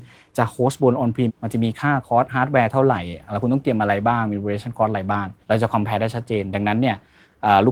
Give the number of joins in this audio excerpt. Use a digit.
2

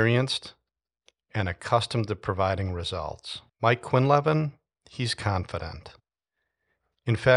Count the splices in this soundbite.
1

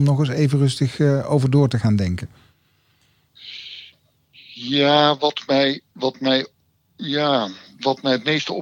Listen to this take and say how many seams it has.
0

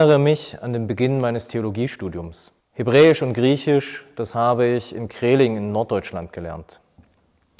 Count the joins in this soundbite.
1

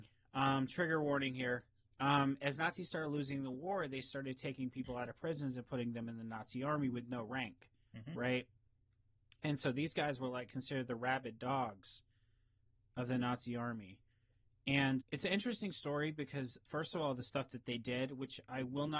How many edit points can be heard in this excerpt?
2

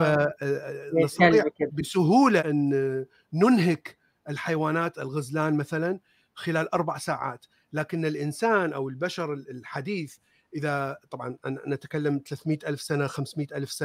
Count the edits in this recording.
1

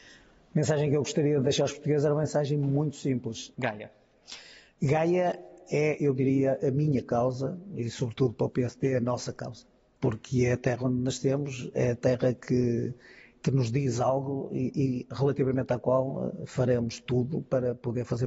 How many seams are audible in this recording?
1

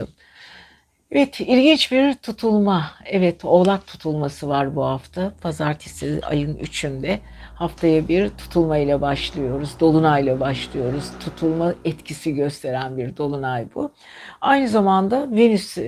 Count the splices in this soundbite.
0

